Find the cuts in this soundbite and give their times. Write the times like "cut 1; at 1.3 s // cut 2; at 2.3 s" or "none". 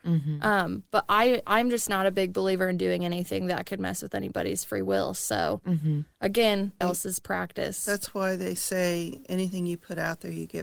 cut 1; at 6.8 s